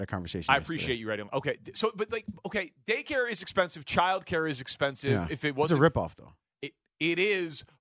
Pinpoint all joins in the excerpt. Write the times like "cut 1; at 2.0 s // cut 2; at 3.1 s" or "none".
none